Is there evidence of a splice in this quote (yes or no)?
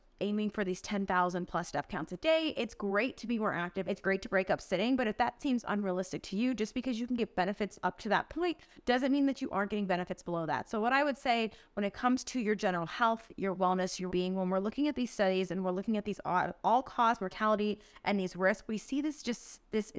yes